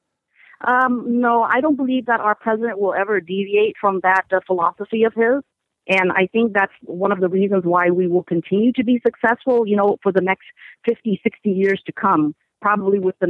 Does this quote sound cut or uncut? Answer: uncut